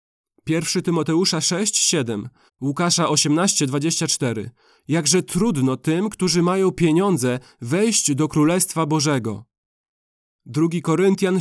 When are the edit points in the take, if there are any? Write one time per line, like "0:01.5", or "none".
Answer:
0:02.5